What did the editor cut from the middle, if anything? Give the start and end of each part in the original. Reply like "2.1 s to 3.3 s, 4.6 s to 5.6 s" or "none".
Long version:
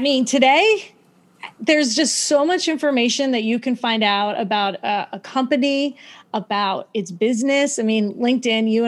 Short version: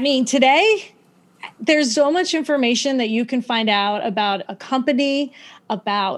1.9 s to 2.3 s, 4.8 s to 5.1 s